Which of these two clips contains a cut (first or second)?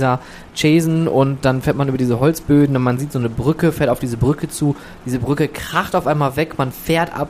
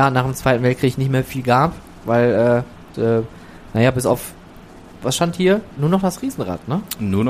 second